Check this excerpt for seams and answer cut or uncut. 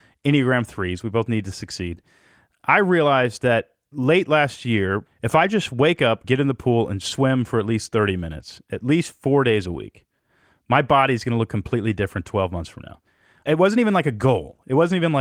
cut